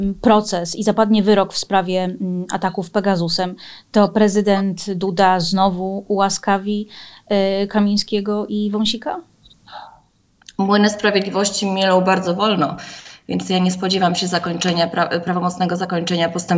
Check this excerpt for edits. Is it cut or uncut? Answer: uncut